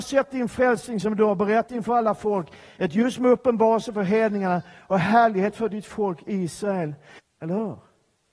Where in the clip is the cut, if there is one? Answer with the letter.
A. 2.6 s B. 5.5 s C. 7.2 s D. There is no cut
C